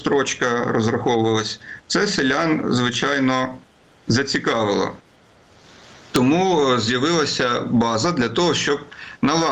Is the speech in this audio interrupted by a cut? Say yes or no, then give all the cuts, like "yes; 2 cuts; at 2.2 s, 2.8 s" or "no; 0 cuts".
no; 0 cuts